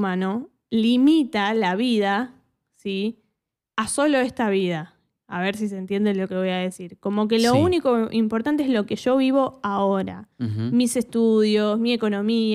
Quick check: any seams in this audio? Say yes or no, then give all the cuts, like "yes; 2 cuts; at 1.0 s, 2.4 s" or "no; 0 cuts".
no; 0 cuts